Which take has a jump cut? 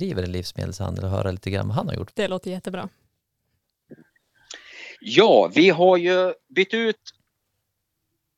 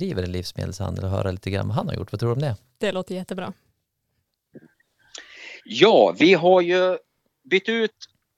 first; 2 cuts; at 2.1 s, 6.4 s

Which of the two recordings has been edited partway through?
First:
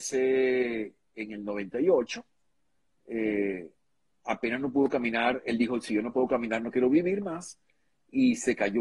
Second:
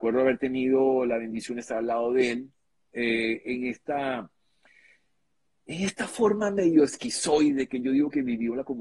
second; 1 cut; at 2.8 s

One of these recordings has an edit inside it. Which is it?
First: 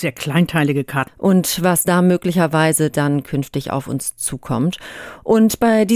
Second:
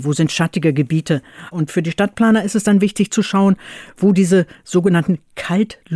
first; 1 cut; at 1.1 s

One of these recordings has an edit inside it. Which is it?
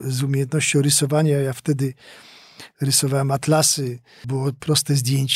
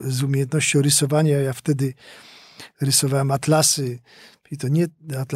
first; 1 cut; at 4.2 s

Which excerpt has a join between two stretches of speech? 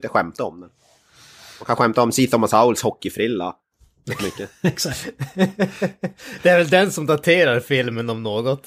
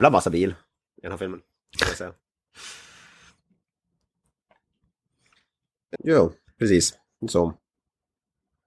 second; 1 cut; at 5.9 s

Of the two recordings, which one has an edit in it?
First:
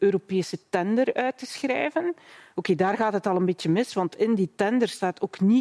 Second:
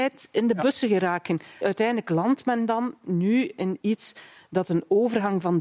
second; 1 cut; at 1.6 s

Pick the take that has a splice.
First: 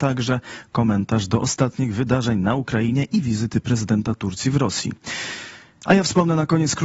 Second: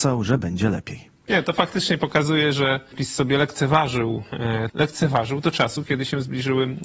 second; 1 cut; at 4.7 s

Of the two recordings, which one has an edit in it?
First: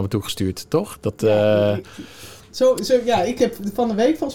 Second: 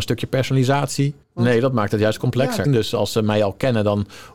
second; 2 cuts; at 1.2 s, 2.6 s

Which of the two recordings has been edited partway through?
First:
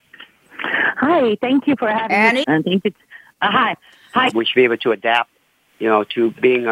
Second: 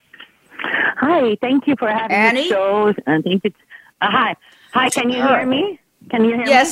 first; 2 cuts; at 2.4 s, 4.3 s

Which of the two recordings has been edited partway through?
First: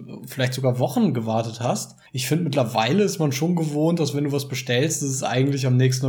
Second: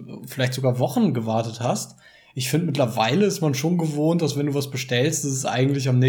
first; 1 cut; at 2.1 s

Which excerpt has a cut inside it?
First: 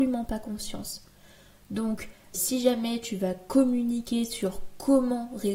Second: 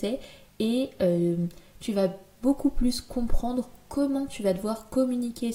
first; 1 cut; at 2.3 s

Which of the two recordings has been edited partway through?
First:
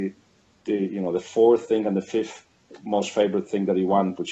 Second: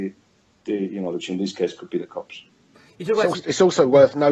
second; 1 cut; at 1.1 s

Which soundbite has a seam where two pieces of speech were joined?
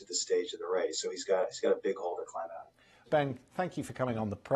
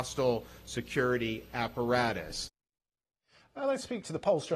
first; 1 cut; at 3.1 s

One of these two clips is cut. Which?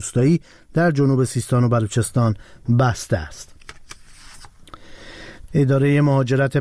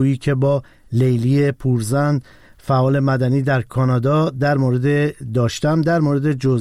first; 1 cut; at 5.5 s

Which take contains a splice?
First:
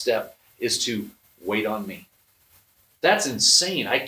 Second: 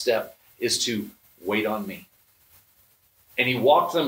first; 1 cut; at 2.9 s

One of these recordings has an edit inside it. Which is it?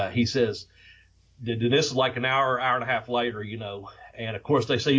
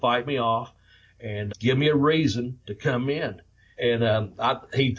second; 2 cuts; at 1.5 s, 3.7 s

